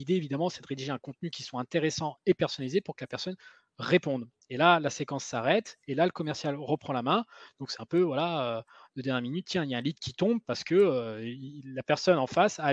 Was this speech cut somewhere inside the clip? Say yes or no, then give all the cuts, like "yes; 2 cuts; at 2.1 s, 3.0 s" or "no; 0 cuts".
no; 0 cuts